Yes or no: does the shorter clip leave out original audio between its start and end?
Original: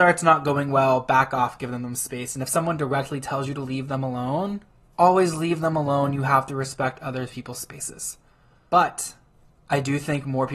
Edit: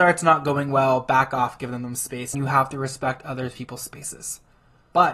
yes